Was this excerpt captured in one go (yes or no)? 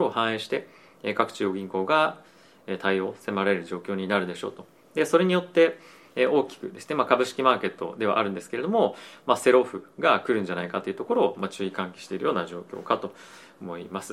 yes